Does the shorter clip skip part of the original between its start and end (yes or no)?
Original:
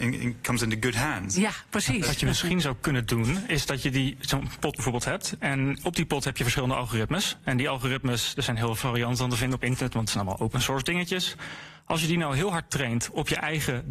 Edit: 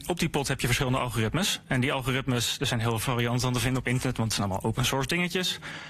no